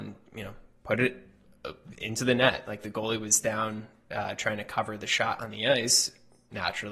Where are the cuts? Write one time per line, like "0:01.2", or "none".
none